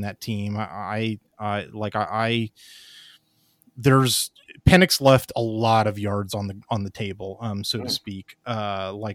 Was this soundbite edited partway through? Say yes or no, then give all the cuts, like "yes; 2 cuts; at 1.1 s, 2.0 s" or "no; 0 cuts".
no; 0 cuts